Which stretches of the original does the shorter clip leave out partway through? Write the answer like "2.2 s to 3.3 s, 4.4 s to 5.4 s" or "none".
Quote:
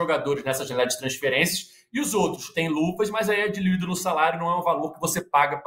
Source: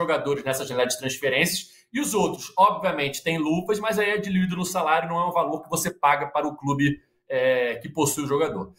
2.5 s to 3.2 s